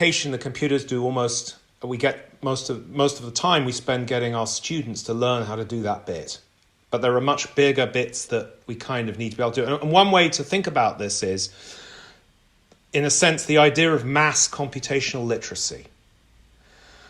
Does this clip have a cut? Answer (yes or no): yes